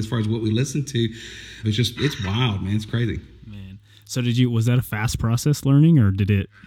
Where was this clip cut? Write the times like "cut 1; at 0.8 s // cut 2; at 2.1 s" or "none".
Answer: cut 1; at 1.6 s